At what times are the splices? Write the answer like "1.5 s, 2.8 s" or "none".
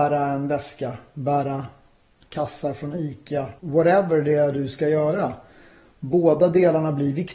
3.6 s